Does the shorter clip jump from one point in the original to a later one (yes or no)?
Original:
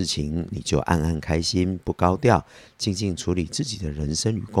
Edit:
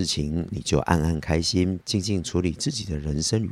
yes